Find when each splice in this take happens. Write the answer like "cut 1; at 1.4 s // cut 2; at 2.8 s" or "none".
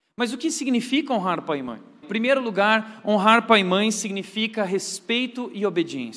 cut 1; at 2.0 s